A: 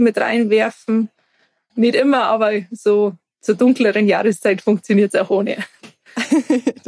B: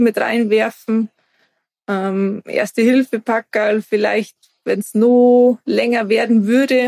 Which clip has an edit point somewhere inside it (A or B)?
A